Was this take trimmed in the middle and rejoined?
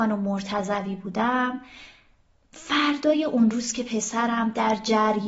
no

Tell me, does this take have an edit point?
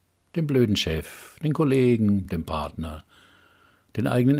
no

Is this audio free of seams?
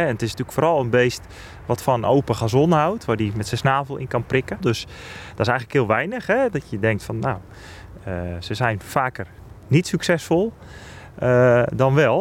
no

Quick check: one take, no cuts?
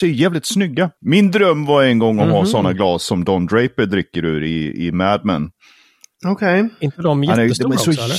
yes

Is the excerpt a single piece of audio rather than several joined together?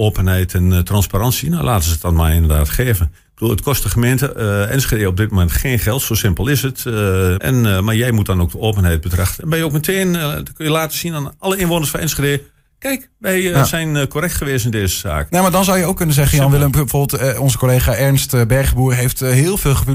no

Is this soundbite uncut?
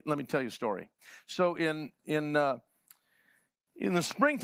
yes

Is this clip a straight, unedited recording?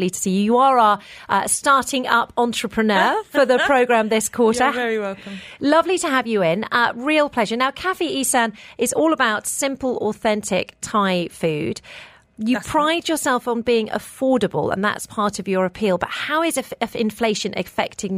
yes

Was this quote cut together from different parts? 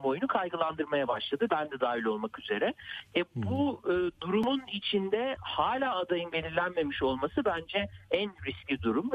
no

